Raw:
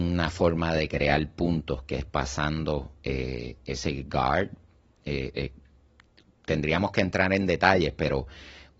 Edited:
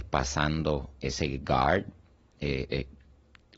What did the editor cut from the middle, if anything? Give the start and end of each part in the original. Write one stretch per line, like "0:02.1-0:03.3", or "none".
0:03.0-0:03.6